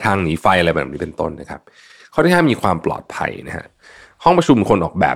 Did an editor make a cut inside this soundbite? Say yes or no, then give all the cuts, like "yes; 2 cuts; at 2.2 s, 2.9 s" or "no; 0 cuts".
no; 0 cuts